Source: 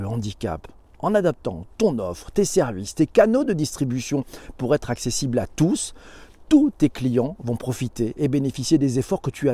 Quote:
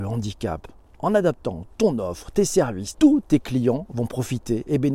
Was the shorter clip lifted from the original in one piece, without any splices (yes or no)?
no